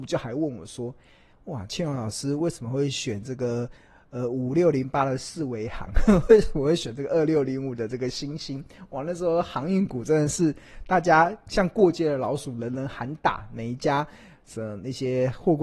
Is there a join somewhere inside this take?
yes; 1 cut; at 1.7 s

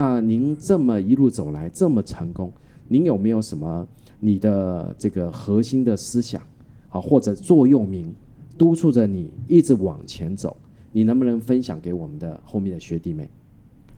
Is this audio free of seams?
yes; 0 cuts

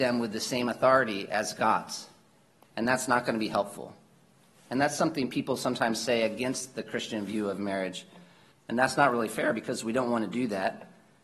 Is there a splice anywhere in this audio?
yes; 1 cut; at 8.5 s

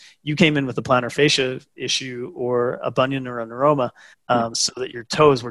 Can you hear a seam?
yes; 1 cut; at 4.1 s

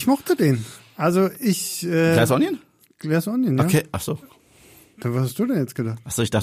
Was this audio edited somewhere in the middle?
no; 0 cuts

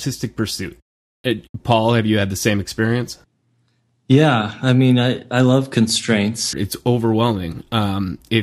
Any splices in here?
yes; 1 cut; at 6.5 s

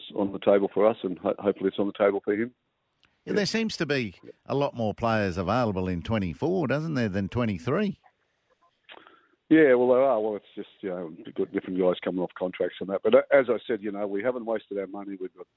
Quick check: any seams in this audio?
no; 0 cuts

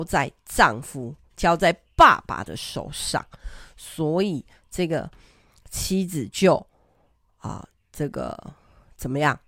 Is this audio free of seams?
yes; 0 cuts

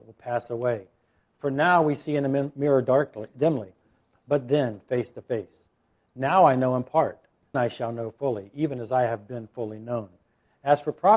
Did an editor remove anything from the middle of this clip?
yes; 1 cut; at 7.5 s

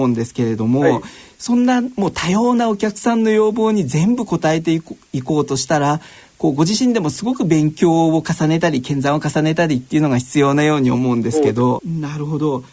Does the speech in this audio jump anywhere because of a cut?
yes; 1 cut; at 11.8 s

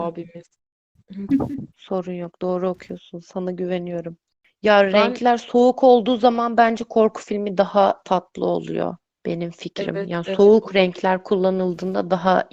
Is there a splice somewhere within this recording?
yes; 1 cut; at 1.3 s

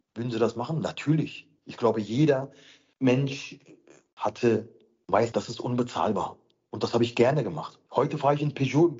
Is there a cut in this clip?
yes; 2 cuts; at 4.2 s, 5.3 s

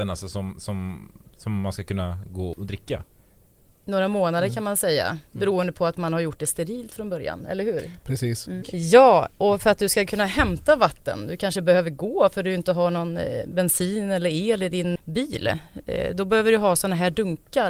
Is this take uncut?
no; 3 cuts; at 2.5 s, 8.6 s, 15.0 s

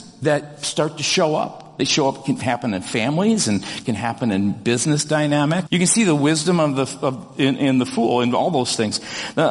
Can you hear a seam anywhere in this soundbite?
yes; 1 cut; at 5.7 s

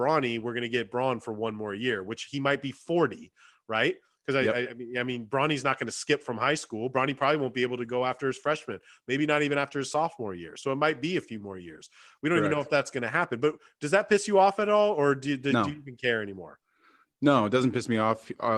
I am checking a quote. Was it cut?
no; 0 cuts

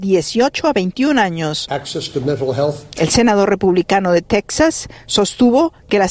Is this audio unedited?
yes; 0 cuts

